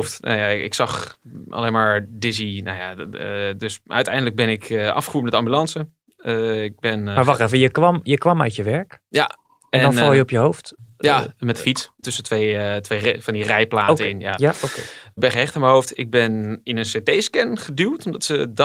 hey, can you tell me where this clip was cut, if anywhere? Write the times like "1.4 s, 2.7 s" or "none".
none